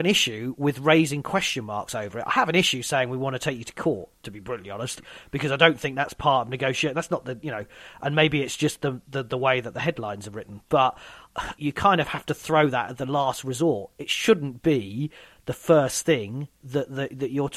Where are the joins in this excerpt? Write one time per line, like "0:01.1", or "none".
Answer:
none

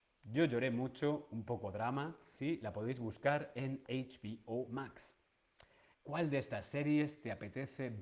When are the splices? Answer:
0:02.3
0:03.8
0:05.9

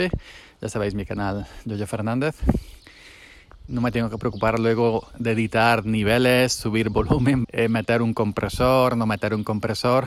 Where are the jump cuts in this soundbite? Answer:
0:03.7
0:07.4

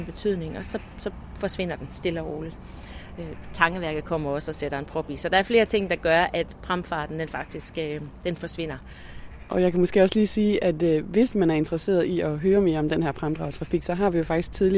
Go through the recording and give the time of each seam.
none

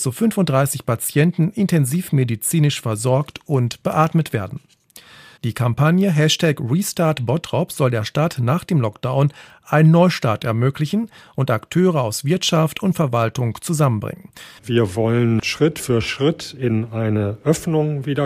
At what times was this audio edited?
0:05.4
0:14.6

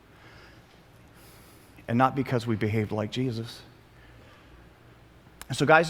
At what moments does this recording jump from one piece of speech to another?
none

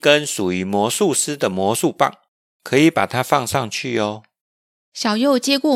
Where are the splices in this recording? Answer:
0:02.5

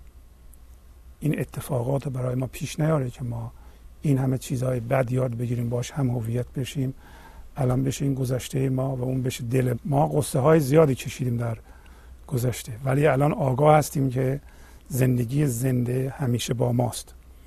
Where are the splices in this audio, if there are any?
0:09.7

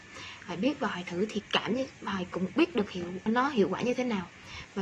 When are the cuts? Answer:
0:03.3

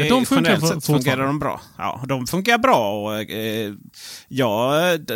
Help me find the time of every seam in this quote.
none

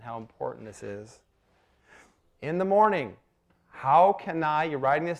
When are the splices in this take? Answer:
0:02.2

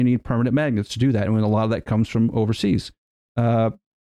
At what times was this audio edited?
none

